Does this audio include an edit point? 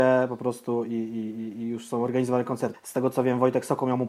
yes; 1 cut; at 2.7 s

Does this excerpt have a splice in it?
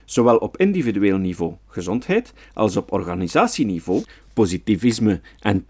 no; 0 cuts

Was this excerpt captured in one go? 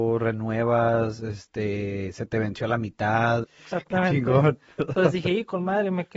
no; 1 cut; at 3.4 s

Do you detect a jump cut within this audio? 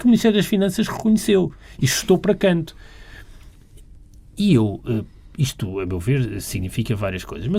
no; 0 cuts

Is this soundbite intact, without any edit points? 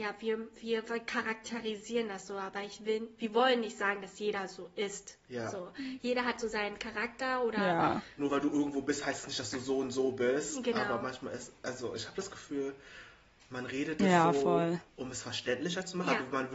yes; 0 cuts

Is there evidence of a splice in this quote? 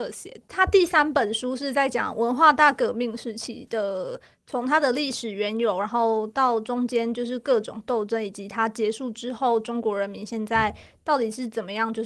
no; 0 cuts

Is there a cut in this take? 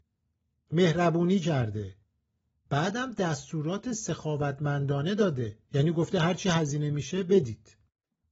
yes; 1 cut; at 5.6 s

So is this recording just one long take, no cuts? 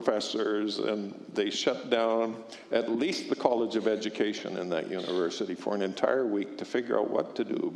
yes; 0 cuts

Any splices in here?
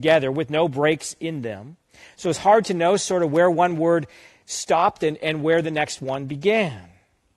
no; 0 cuts

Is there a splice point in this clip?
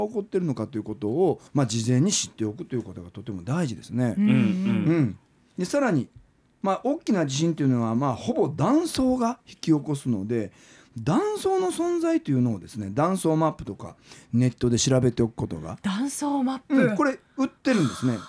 yes; 1 cut; at 1.5 s

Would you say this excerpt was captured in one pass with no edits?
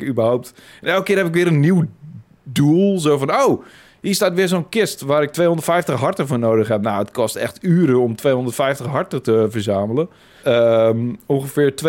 no; 1 cut; at 10.4 s

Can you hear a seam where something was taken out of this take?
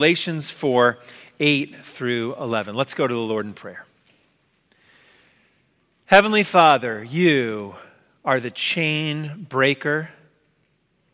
no; 0 cuts

